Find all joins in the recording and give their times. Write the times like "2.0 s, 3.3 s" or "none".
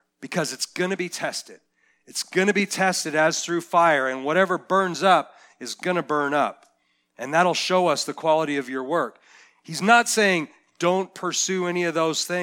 none